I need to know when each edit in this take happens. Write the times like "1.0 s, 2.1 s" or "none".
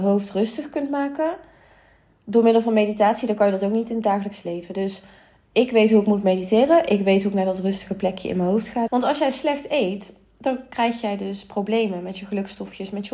8.9 s